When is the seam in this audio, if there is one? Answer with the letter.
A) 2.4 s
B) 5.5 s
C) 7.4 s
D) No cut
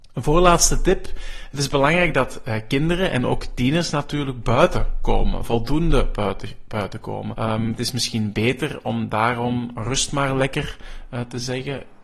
C